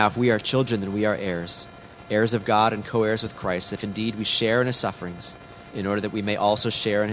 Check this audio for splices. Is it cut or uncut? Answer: uncut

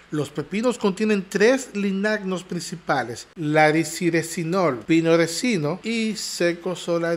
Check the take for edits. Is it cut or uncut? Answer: uncut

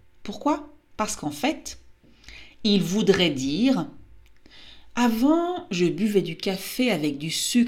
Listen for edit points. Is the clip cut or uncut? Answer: uncut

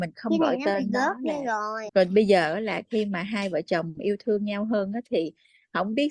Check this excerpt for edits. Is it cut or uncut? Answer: cut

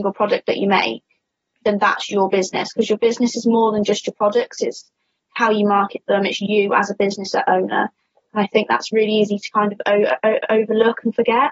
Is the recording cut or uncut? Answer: uncut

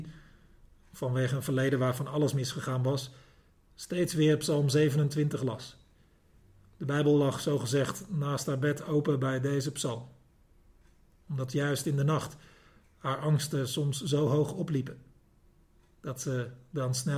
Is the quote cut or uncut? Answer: uncut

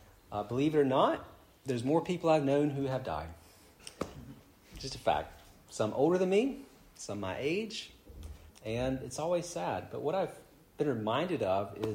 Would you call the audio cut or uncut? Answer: cut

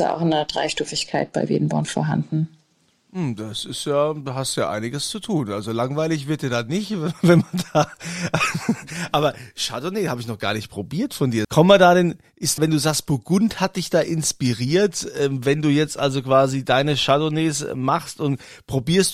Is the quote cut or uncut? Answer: cut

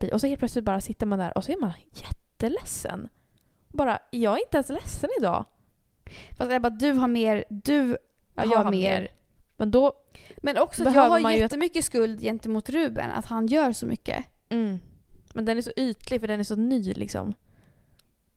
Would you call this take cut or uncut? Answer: cut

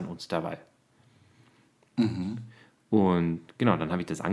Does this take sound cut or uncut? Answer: uncut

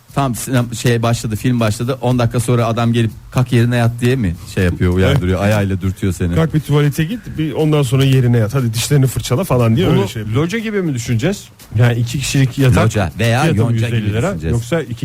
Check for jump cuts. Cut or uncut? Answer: uncut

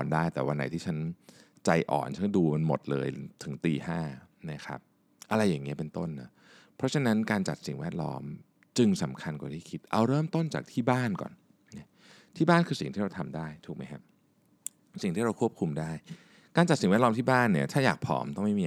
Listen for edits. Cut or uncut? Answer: uncut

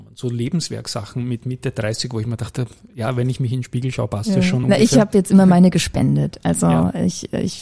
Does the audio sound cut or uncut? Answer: uncut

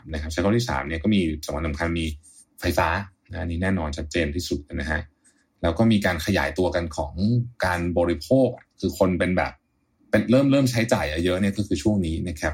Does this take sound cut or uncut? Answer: uncut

